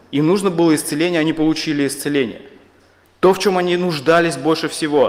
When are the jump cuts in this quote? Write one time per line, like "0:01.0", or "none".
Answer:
0:03.0